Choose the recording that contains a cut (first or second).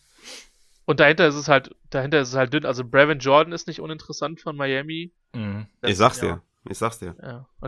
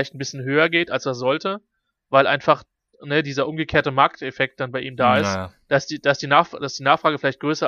first